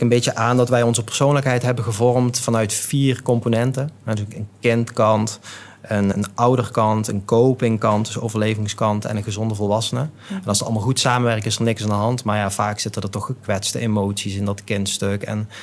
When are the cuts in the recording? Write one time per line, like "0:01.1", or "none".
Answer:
0:06.1